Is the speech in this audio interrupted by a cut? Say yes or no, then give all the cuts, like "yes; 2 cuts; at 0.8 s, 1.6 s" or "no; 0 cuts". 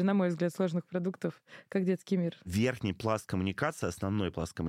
no; 0 cuts